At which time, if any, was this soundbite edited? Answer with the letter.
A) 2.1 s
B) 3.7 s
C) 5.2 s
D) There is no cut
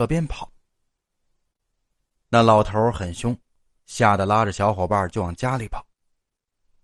B